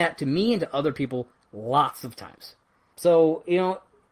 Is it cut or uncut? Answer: cut